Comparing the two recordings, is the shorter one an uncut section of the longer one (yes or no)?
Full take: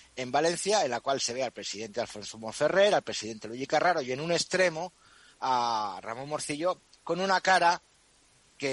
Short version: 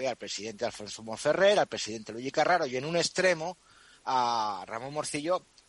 yes